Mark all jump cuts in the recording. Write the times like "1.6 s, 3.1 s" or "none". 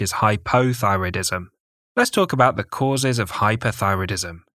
1.8 s